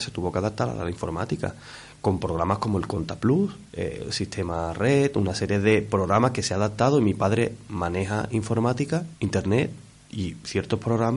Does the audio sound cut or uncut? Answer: cut